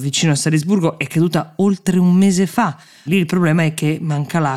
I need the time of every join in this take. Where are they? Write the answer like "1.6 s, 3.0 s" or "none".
3.1 s